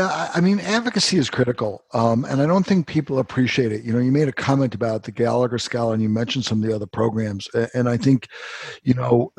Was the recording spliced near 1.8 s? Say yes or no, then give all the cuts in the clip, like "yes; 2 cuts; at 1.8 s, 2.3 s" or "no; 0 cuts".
no; 0 cuts